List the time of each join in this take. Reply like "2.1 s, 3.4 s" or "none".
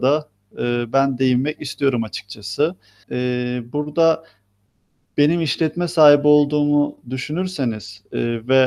3.0 s